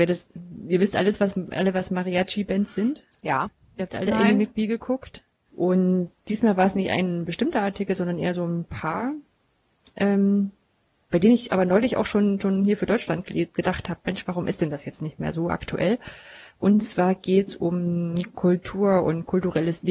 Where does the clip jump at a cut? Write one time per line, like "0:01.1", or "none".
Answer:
0:05.5